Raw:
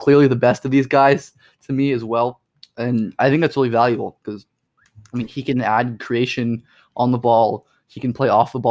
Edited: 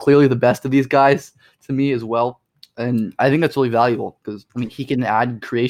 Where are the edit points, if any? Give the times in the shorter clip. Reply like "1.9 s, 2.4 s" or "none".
4.5 s